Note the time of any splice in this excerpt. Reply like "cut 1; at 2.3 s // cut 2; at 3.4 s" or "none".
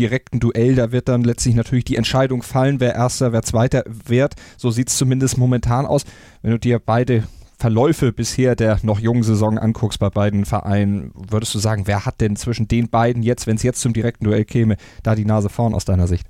none